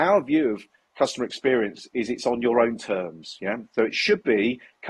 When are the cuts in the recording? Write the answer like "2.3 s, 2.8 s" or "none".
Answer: none